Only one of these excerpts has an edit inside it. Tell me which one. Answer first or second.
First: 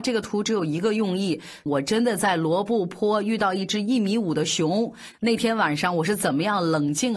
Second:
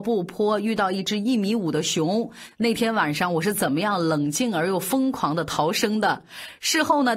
first